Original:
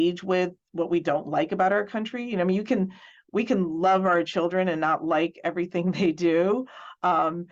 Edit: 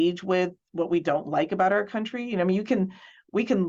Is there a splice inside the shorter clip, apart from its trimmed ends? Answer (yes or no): no